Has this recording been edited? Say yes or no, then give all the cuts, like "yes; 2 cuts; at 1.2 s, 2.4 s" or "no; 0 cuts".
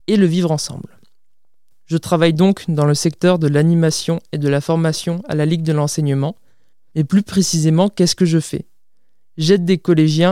no; 0 cuts